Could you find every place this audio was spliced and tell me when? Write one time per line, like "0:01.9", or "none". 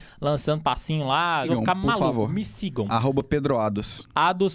0:01.4